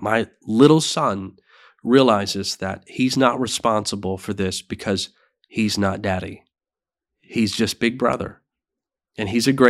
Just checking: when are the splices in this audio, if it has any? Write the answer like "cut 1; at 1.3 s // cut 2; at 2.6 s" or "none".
none